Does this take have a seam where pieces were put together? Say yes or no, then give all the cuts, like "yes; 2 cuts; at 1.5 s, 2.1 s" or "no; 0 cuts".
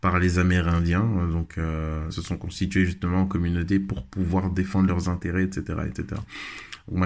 yes; 1 cut; at 2.1 s